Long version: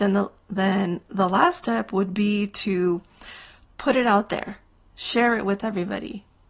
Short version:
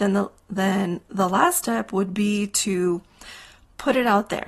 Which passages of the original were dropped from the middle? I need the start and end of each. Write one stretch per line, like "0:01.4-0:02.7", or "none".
none

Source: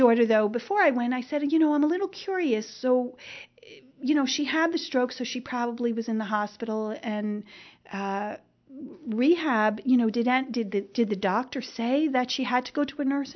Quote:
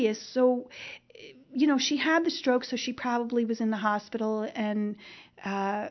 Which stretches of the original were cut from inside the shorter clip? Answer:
none

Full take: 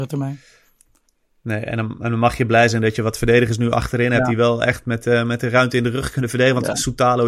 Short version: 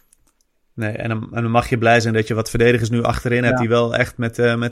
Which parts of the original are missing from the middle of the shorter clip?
none

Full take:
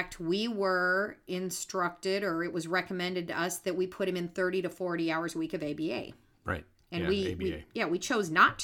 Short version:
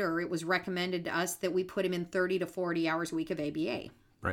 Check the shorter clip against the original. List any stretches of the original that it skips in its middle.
none

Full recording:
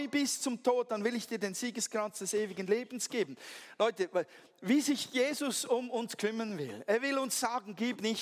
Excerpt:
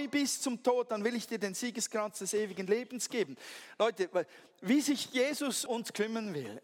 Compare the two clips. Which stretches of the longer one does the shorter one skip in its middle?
0:05.7-0:05.9

